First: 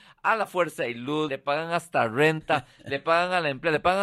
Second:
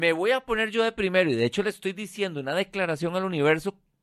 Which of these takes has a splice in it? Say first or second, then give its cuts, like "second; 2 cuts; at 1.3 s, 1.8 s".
first; 1 cut; at 1.3 s